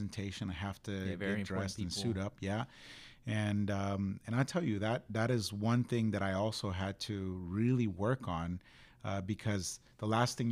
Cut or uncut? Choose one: uncut